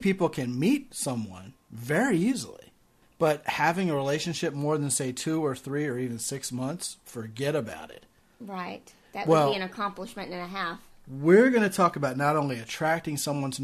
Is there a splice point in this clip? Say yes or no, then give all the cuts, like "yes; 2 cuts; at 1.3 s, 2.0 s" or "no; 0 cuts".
no; 0 cuts